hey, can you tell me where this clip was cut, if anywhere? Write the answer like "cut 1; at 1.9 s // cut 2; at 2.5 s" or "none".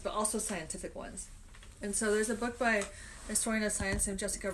none